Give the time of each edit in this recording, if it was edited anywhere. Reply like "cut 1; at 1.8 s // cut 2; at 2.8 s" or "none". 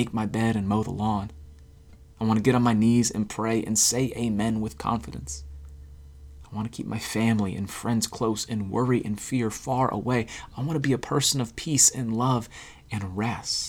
cut 1; at 6.4 s